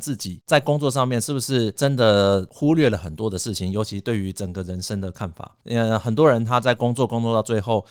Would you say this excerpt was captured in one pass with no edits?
yes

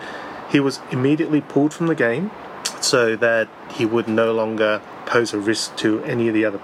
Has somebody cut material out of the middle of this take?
no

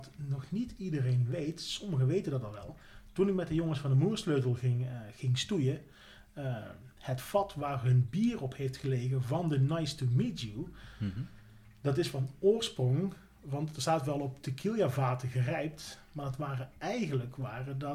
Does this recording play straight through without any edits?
yes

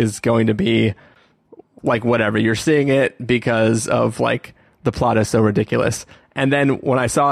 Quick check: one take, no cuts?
yes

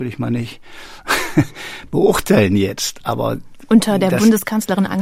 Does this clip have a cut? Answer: no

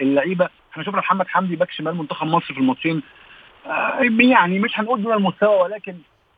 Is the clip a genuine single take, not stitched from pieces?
yes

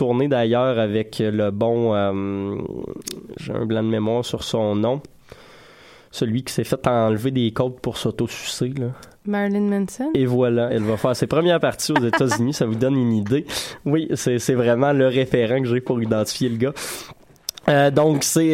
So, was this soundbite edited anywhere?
no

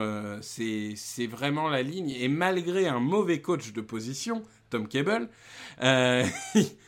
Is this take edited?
no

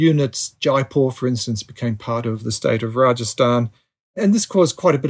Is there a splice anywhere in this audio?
no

